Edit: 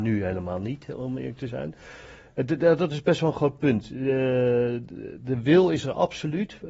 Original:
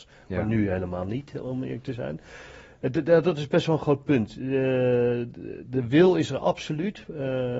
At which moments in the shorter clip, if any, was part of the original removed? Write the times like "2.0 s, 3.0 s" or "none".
none